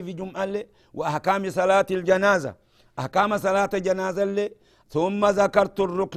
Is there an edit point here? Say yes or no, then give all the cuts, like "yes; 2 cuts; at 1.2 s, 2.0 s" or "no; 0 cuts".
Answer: no; 0 cuts